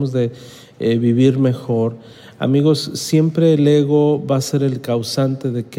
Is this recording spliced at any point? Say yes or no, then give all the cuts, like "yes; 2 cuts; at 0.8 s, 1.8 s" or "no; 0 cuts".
no; 0 cuts